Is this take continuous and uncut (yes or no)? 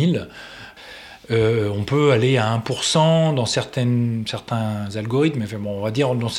yes